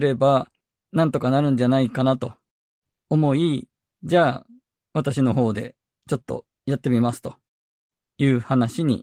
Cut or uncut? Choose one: uncut